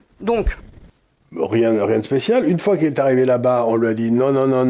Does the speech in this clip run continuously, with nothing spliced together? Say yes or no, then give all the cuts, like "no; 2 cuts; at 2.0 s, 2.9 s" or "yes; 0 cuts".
yes; 0 cuts